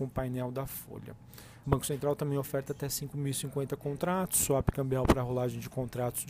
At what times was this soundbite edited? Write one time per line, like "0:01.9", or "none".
0:01.6

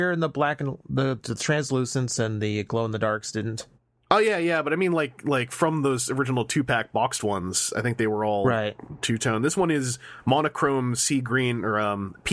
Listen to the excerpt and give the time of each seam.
none

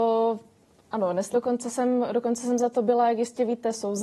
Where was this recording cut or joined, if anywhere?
0:01.3

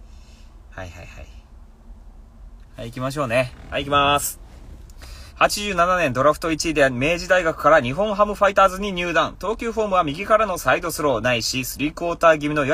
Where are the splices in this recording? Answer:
0:05.3

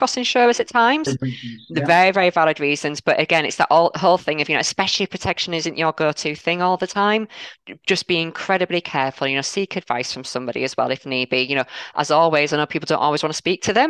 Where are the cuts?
0:01.1

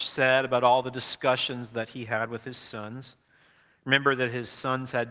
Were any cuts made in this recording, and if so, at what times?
none

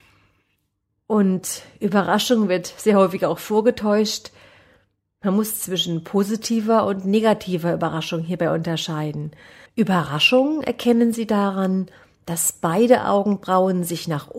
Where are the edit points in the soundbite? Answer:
0:05.1
0:09.7

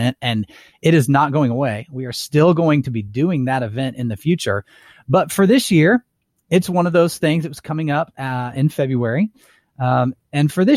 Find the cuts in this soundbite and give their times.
none

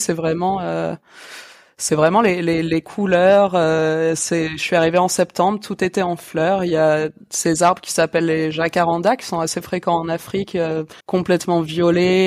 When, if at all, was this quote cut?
0:11.0

